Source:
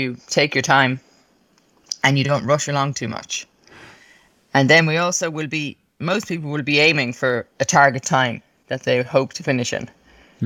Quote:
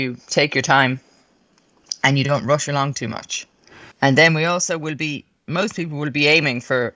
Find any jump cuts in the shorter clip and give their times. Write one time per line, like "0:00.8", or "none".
0:03.9